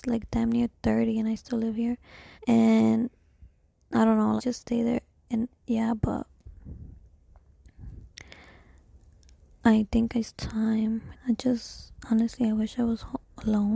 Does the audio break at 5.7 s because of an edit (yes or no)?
no